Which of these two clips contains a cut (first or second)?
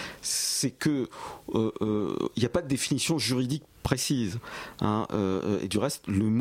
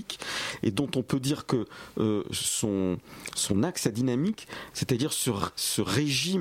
second